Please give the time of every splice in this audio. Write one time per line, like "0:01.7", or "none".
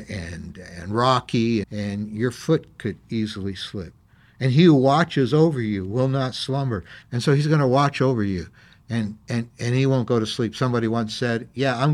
0:01.6
0:07.0